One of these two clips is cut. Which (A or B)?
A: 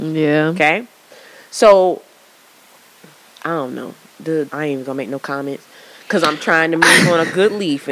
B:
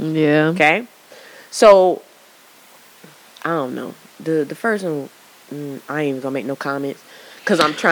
A